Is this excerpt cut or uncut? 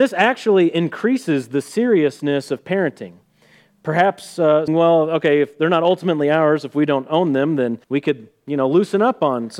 cut